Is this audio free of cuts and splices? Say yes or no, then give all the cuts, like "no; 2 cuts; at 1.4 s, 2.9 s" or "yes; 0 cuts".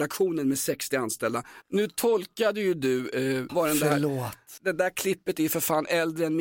no; 3 cuts; at 1.6 s, 3.5 s, 4.6 s